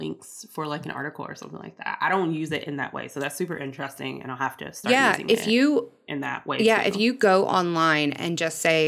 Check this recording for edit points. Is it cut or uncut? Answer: uncut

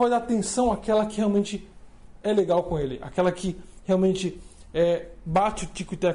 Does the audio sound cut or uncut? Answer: uncut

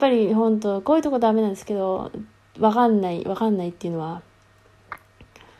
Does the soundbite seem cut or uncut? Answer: uncut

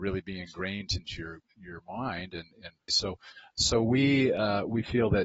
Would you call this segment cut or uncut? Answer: cut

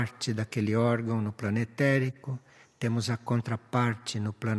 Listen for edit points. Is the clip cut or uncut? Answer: uncut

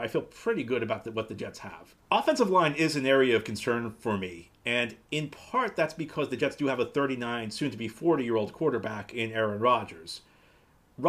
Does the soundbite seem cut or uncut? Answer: uncut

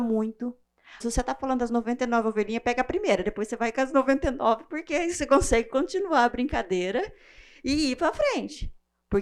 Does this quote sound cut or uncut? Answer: cut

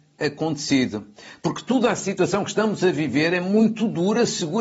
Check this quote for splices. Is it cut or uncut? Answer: uncut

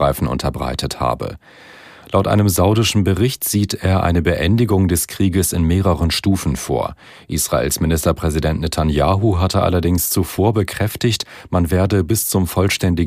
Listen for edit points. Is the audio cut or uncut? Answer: uncut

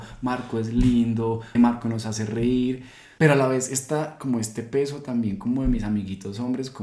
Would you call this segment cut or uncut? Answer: cut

